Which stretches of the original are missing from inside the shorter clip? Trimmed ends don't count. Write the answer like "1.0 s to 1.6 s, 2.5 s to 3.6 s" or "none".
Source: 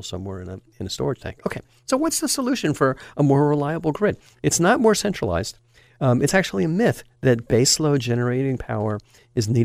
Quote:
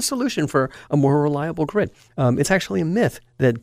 4.4 s to 5.9 s

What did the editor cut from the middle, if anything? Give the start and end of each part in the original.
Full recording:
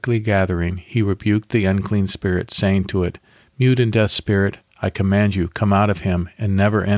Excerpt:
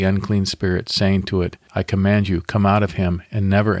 3.3 s to 4.7 s

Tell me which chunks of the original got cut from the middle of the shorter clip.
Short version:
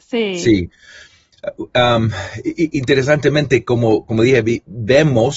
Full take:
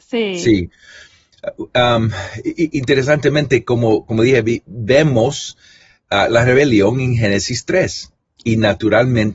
none

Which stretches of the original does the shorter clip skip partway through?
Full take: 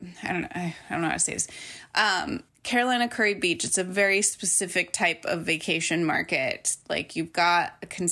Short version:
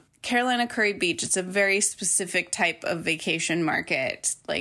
none

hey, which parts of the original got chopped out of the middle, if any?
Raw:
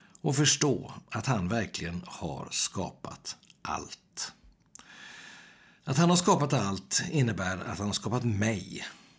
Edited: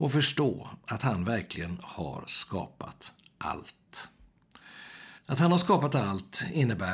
5.4 s to 5.8 s

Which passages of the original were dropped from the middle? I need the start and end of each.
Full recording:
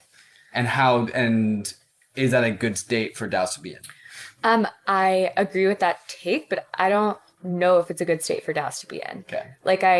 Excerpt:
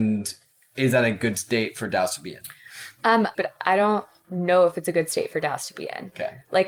4.7 s to 6.5 s

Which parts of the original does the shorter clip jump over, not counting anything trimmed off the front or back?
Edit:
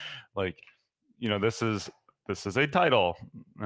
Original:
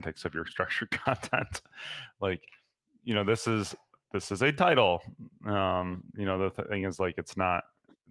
none

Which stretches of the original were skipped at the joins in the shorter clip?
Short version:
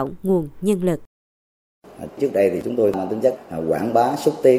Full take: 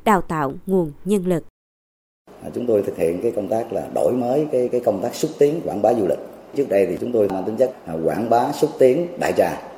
2.5 s to 6.4 s

